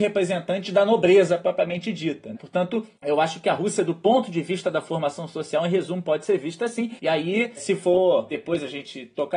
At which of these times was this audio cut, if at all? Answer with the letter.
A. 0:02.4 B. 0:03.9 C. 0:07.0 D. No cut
C